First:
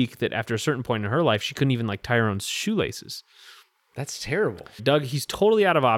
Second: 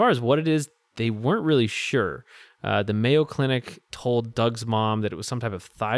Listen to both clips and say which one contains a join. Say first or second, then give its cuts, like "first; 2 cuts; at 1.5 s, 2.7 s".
first; 1 cut; at 4.8 s